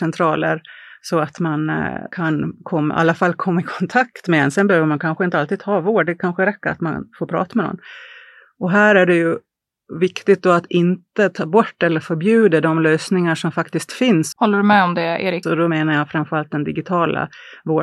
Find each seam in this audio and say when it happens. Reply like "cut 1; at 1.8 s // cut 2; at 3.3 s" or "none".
cut 1; at 14.3 s // cut 2; at 15.4 s